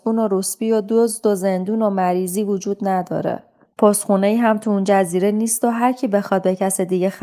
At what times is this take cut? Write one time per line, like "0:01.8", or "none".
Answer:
0:03.6